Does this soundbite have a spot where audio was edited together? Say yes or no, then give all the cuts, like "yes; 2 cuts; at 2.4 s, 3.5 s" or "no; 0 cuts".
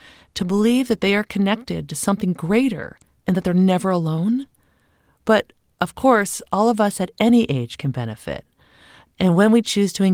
yes; 1 cut; at 9.1 s